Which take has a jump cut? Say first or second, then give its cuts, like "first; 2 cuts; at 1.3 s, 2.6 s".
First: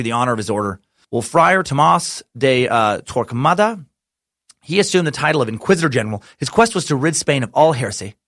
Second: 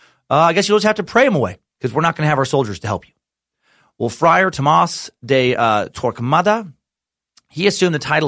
first; 1 cut; at 1.0 s